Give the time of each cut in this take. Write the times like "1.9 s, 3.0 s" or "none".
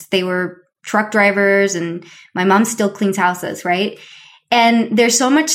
none